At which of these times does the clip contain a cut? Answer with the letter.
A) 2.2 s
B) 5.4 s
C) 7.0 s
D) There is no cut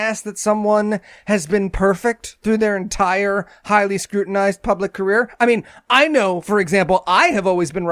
D